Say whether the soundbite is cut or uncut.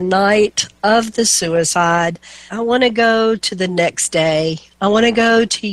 cut